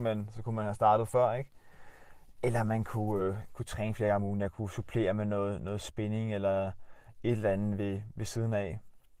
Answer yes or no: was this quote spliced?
no